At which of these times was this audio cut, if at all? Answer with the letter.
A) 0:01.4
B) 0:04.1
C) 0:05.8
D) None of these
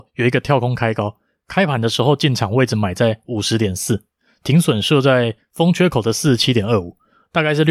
D